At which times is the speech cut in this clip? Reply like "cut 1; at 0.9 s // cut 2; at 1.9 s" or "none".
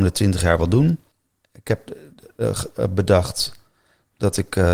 cut 1; at 1.9 s